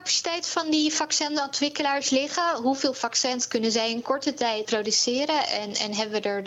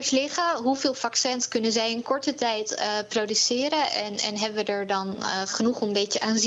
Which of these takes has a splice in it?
first; 1 cut; at 4.6 s

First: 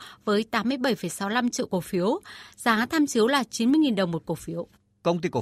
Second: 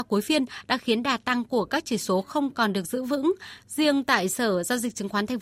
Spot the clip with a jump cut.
second; 1 cut; at 3.6 s

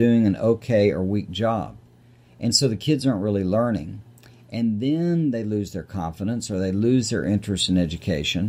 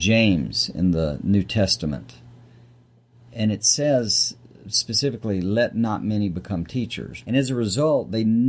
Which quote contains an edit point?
second; 1 cut; at 7.2 s

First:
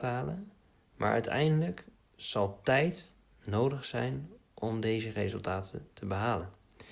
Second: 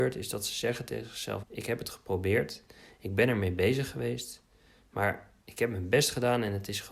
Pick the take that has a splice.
second; 1 cut; at 1.4 s

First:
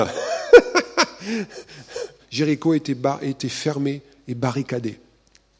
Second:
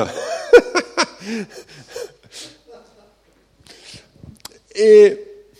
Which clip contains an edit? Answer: first; 1 cut; at 2.2 s

